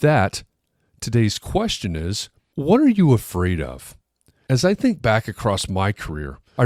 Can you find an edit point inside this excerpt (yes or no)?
no